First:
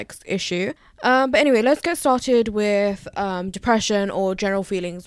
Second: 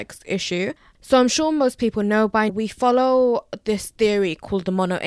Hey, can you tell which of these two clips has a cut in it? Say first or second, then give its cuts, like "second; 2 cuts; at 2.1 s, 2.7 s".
second; 2 cuts; at 0.9 s, 2.5 s